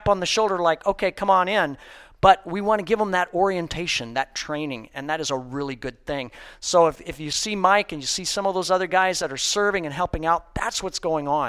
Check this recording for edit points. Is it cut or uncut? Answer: uncut